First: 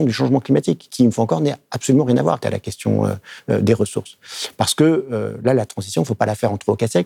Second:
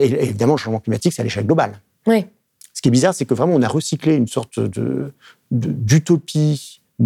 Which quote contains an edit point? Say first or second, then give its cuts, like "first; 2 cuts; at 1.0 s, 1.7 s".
first; 1 cut; at 2.4 s